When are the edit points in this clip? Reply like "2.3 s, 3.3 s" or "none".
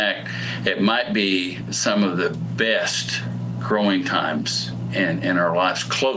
none

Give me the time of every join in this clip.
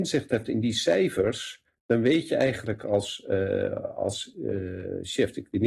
none

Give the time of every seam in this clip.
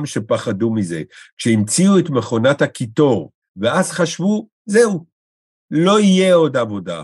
3.4 s

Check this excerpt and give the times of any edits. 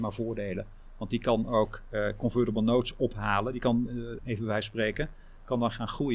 4.2 s

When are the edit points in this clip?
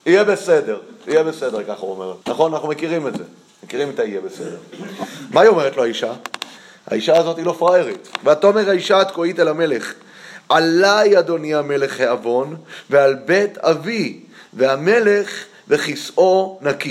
2.2 s

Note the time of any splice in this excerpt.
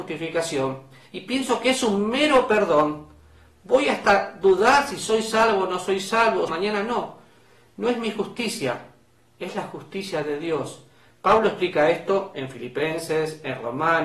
6.5 s

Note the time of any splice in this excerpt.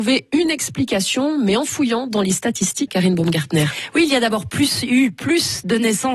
2.9 s

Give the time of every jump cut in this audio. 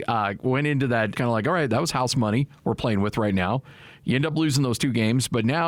1.1 s

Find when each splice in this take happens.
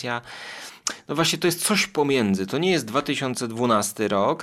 none

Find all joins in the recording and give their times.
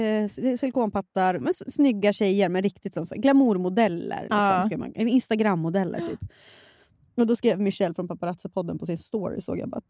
1.4 s

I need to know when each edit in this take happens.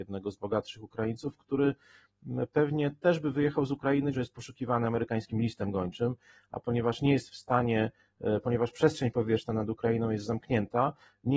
4.1 s

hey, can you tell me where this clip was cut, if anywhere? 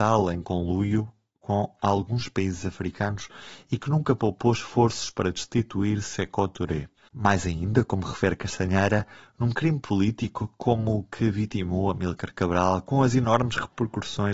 7.1 s

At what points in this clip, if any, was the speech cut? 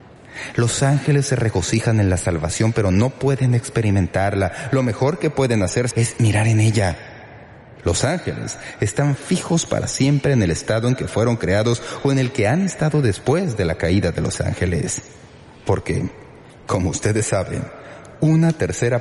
5.9 s, 7.8 s

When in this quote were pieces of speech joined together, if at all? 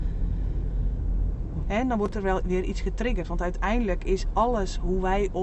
1.6 s

